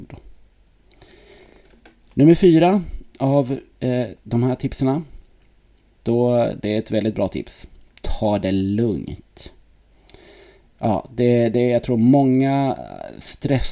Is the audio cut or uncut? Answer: uncut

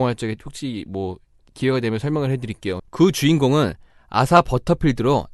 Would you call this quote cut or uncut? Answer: cut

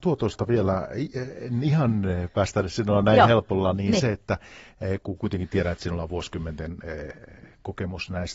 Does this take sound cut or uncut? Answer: uncut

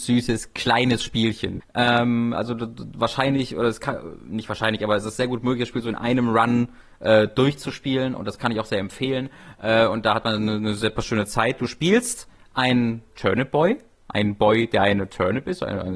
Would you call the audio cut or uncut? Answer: cut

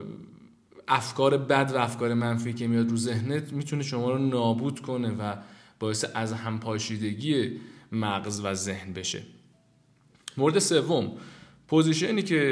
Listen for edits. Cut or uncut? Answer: uncut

